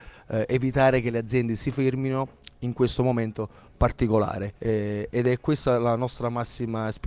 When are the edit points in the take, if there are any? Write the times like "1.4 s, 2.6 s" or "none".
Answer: 4.6 s